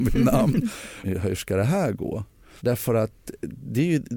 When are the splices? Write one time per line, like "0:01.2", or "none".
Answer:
0:01.0
0:02.6